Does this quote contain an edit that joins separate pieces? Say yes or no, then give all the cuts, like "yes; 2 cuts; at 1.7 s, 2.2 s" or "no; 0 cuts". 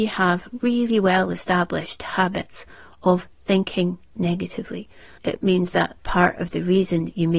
yes; 1 cut; at 5.2 s